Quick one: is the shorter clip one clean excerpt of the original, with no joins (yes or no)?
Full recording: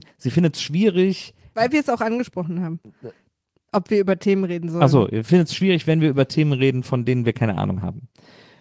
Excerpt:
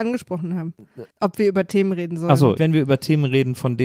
no